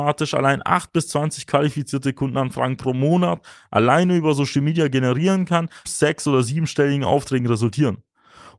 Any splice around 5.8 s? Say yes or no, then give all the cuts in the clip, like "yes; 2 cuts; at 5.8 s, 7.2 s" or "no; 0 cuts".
yes; 1 cut; at 5.8 s